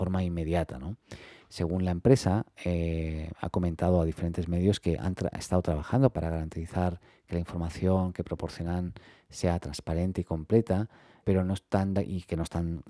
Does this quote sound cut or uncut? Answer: cut